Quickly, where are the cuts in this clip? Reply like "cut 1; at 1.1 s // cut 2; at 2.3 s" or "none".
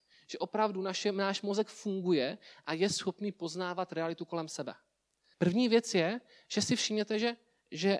cut 1; at 5.3 s